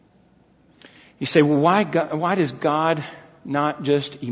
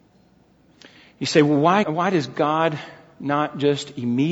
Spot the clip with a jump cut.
second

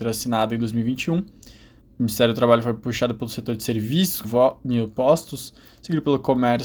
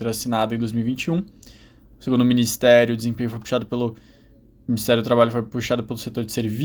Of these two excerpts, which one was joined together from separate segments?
first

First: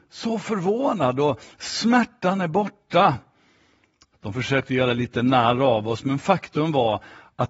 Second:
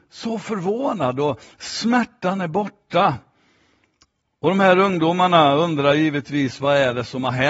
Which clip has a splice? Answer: first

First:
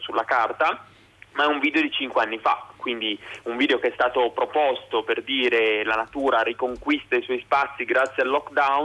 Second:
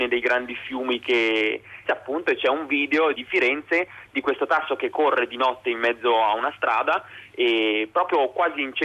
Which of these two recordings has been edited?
second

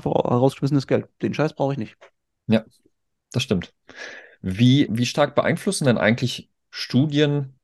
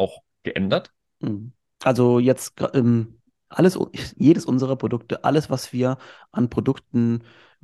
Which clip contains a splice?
first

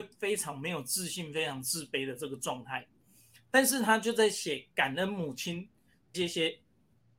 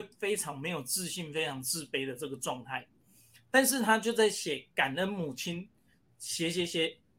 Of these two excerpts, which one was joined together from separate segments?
first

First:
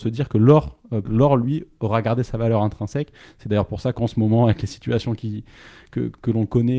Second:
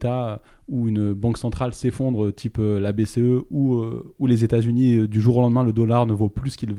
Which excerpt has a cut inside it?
first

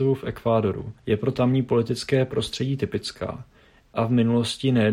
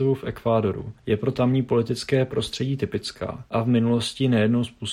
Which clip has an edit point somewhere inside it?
second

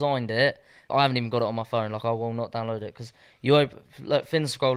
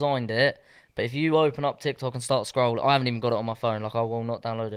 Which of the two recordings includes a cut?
first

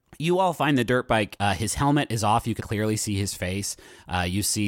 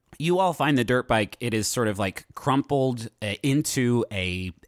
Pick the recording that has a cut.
first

